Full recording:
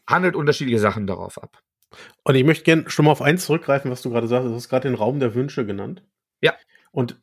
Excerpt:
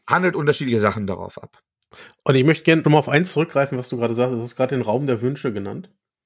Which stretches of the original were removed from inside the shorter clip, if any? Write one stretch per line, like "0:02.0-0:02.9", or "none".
0:02.8-0:03.0